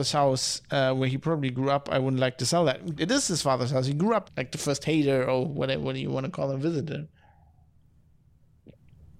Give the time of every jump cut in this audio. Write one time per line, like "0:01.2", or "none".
0:03.0
0:04.3